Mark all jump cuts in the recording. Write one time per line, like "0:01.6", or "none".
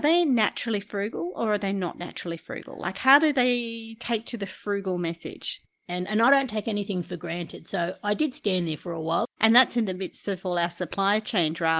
0:05.7
0:09.2